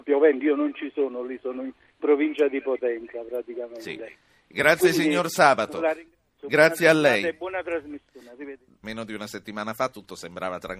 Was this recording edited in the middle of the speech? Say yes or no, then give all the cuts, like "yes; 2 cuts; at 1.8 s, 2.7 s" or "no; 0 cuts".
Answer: yes; 1 cut; at 8.8 s